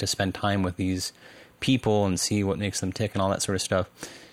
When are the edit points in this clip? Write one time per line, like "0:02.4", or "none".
none